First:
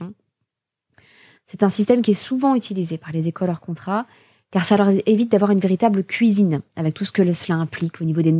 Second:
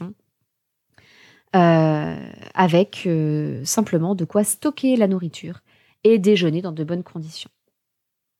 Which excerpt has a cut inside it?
first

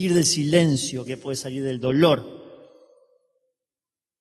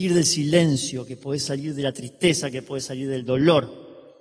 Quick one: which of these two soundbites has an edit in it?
first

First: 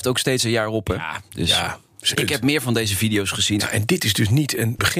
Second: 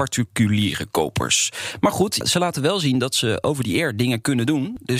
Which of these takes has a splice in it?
first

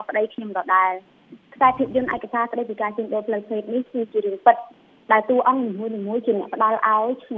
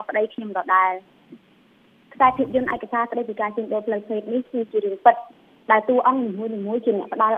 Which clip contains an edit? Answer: first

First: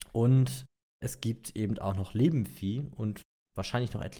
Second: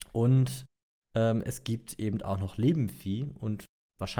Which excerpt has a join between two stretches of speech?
first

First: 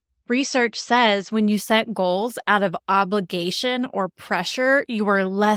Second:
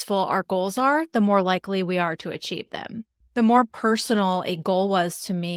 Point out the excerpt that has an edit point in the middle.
second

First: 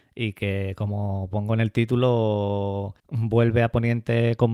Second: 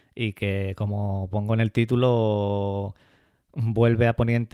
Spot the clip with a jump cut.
first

